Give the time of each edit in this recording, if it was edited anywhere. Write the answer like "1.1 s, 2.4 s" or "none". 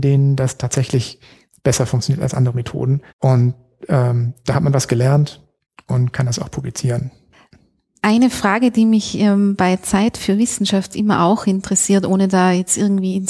3.1 s